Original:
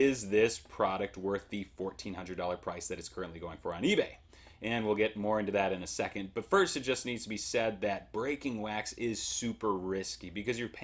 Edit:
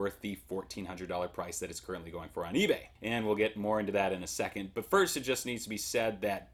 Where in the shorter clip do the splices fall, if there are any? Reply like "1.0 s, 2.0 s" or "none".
3.0 s